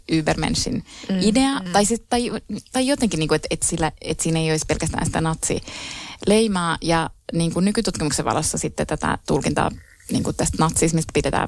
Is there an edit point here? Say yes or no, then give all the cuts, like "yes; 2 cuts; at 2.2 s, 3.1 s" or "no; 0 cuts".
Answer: yes; 1 cut; at 1.7 s